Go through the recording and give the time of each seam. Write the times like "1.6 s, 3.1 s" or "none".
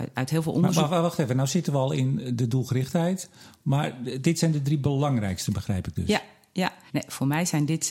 6.9 s